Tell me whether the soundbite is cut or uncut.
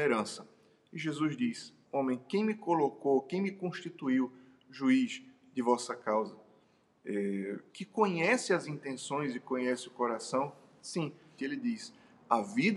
cut